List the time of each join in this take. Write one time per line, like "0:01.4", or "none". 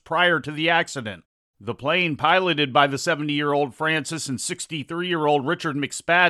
0:01.5